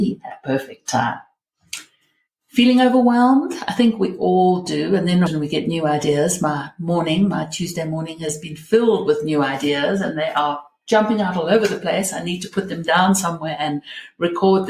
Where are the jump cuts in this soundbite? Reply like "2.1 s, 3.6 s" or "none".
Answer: 5.3 s